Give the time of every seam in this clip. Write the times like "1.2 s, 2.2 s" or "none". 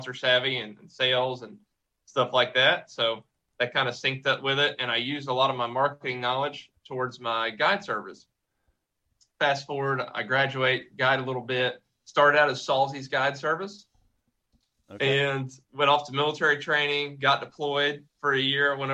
none